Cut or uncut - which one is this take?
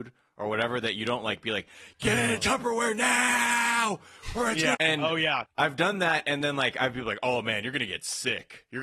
cut